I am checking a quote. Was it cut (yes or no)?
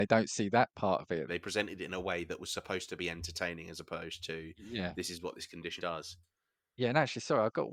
yes